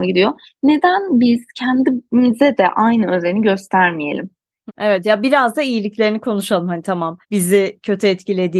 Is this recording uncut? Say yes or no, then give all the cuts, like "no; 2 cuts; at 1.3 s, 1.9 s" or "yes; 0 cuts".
no; 2 cuts; at 4.7 s, 7.2 s